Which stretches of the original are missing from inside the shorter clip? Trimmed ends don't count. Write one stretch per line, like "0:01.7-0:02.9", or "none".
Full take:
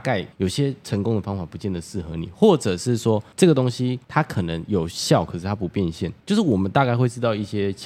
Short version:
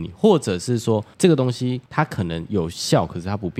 none